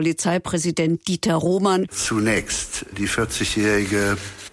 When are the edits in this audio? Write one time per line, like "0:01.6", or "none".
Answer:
0:01.9